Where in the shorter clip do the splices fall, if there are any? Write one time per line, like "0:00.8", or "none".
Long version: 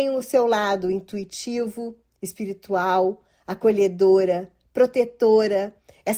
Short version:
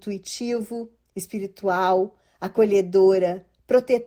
none